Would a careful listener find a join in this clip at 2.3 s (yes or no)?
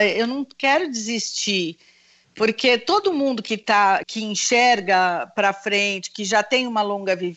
no